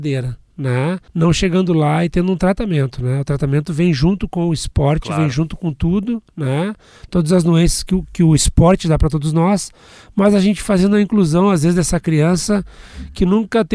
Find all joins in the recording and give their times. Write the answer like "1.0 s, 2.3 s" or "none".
1.1 s